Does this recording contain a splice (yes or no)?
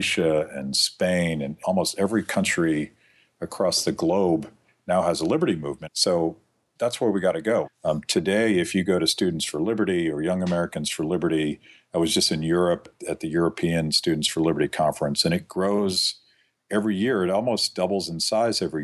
yes